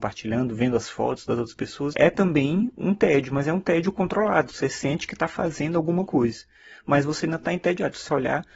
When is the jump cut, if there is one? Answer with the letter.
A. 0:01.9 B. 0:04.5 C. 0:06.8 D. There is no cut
A